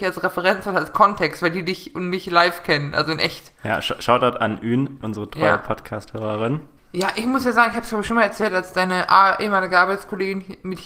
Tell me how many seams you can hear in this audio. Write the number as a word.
two